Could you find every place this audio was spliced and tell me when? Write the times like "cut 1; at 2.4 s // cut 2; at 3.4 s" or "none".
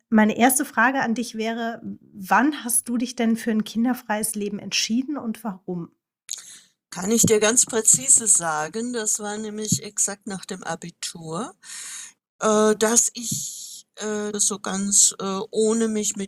cut 1; at 12.2 s // cut 2; at 14.3 s